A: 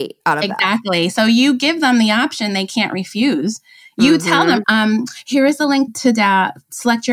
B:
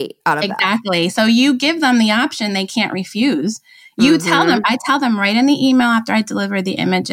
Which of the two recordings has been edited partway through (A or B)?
A